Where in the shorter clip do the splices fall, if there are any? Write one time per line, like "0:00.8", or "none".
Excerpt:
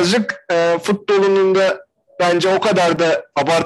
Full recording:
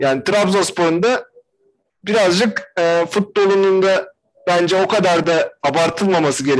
none